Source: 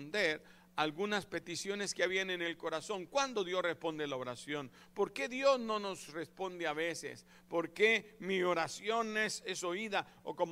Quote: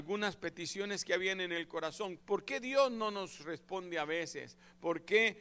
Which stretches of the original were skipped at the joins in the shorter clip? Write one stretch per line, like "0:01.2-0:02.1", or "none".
0:03.1-0:04.9

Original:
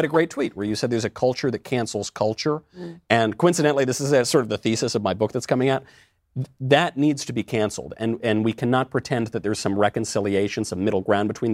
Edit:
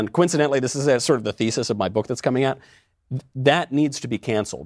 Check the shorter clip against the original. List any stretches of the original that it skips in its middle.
none

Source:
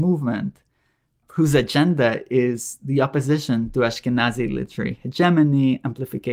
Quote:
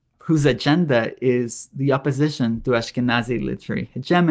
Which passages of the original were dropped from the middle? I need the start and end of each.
none

